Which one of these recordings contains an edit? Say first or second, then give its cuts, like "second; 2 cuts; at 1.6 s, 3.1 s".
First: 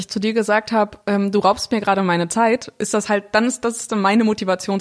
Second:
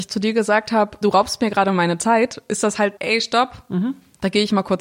second; 2 cuts; at 1.0 s, 3.0 s